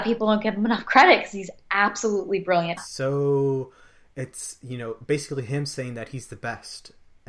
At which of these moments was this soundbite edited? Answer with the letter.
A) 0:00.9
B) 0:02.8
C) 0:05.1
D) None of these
B